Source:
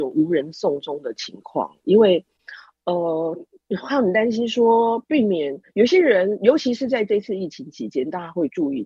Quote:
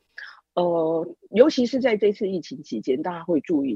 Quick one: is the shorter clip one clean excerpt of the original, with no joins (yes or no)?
no